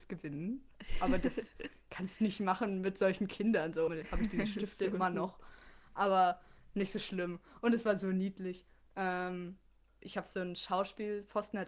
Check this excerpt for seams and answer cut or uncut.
cut